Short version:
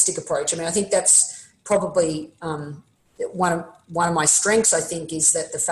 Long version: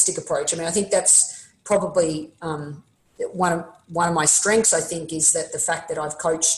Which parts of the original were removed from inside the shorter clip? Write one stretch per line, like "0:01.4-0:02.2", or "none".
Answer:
none